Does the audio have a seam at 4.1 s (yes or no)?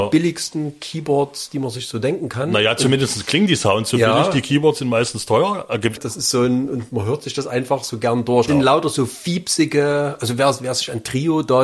no